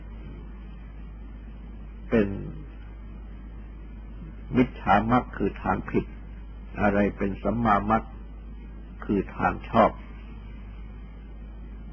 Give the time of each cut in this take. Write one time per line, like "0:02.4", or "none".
none